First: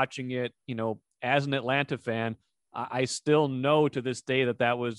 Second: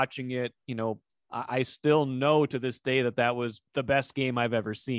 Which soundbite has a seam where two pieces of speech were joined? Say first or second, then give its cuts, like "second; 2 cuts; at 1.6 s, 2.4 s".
second; 2 cuts; at 1.1 s, 3.7 s